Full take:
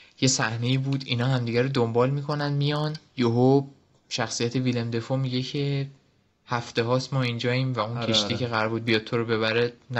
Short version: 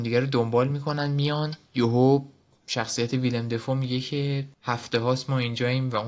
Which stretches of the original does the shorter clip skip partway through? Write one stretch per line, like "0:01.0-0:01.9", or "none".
0:06.0-0:06.4